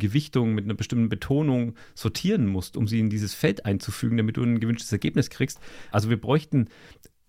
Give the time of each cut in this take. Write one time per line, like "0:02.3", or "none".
0:05.9